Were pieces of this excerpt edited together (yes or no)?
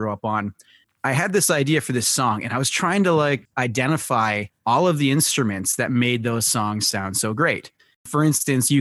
no